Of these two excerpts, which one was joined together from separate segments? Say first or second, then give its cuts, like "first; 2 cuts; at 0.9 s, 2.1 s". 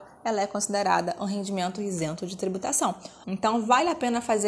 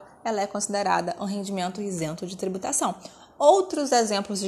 first; 1 cut; at 3.2 s